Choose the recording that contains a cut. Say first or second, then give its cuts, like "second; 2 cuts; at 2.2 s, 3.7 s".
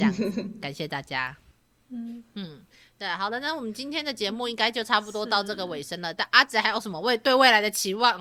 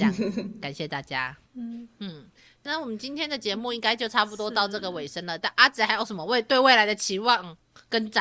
second; 2 cuts; at 1.5 s, 2.7 s